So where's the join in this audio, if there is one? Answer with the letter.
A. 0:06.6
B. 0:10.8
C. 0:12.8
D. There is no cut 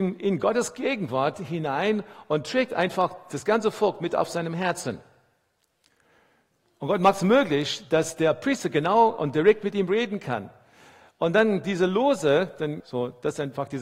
C